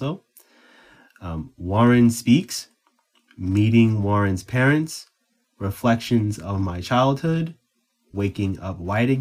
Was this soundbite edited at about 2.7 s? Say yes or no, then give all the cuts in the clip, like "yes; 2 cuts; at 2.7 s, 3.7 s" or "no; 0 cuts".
no; 1 cut; at 5.4 s